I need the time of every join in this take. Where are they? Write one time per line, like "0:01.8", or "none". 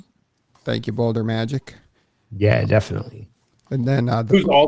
none